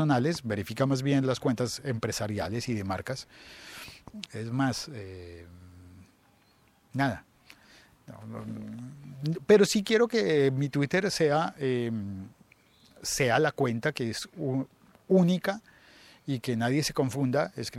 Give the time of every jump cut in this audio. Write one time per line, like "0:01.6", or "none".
0:04.3